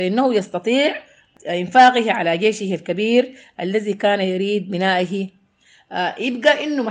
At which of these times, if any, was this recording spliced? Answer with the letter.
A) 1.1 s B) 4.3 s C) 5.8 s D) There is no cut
D